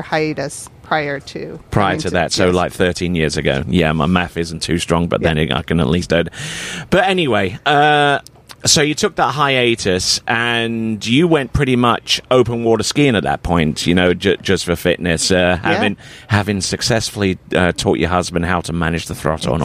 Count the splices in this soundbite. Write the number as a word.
two